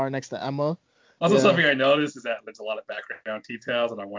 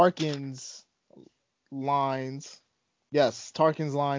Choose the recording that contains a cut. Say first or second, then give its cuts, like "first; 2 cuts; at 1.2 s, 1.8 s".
first; 1 cut; at 1.2 s